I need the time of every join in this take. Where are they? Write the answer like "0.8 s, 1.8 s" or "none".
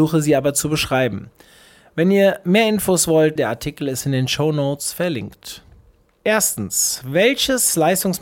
3.4 s